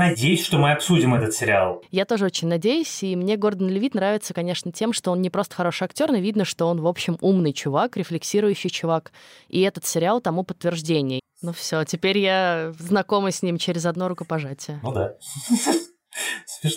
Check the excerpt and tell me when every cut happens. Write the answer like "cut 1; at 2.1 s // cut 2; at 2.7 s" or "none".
cut 1; at 11.2 s

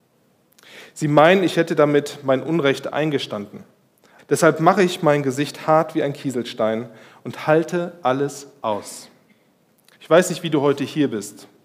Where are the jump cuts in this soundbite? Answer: cut 1; at 4.2 s // cut 2; at 9.9 s

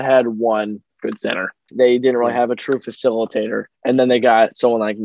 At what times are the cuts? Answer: cut 1; at 1.7 s // cut 2; at 3.7 s

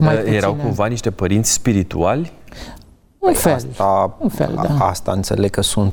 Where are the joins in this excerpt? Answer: none

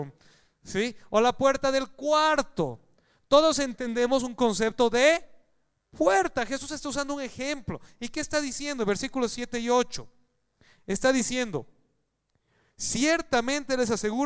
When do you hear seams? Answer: none

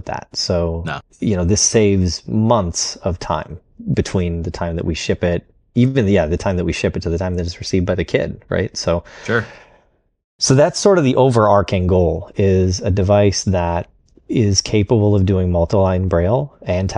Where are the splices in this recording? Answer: none

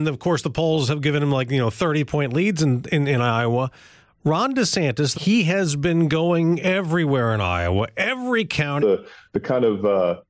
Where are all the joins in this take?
cut 1; at 5.1 s // cut 2; at 8.8 s

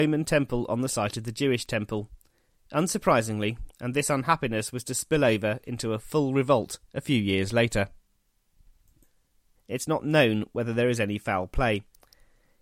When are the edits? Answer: cut 1; at 3.7 s // cut 2; at 9.6 s

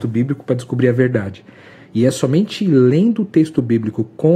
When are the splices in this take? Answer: cut 1; at 1.7 s

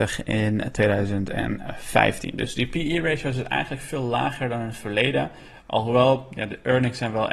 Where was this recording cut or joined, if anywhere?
none

